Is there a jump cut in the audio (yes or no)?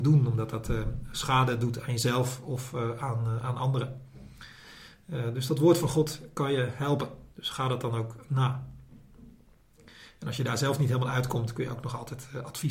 no